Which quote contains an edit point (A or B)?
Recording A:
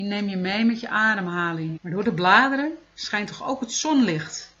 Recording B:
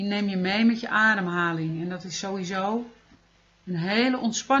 A